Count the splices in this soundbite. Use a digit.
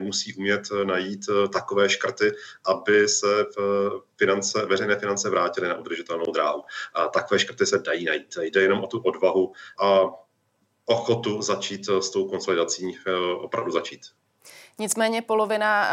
1